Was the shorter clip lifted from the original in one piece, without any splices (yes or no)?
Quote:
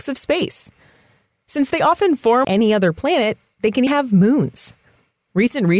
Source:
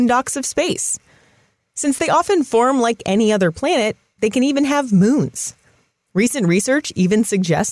no